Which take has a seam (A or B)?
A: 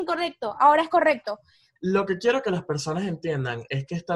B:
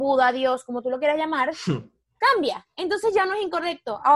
A